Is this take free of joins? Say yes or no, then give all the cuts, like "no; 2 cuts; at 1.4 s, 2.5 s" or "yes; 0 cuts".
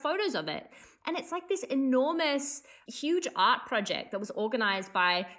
no; 1 cut; at 2.9 s